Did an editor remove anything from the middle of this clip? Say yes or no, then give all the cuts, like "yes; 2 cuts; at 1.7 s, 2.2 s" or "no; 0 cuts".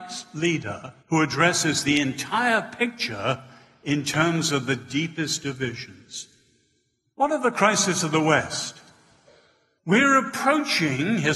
yes; 2 cuts; at 1.0 s, 7.1 s